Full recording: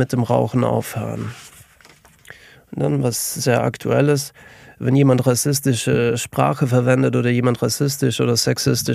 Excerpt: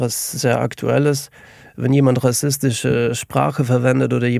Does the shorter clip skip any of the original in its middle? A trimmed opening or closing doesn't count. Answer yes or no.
no